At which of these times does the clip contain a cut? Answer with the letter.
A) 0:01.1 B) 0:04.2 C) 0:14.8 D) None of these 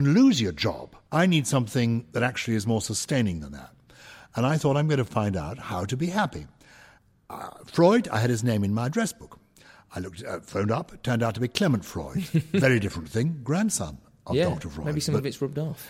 A